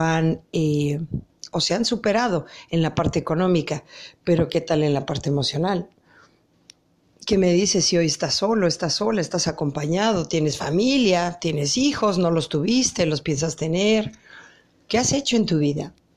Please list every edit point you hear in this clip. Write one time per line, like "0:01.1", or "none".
none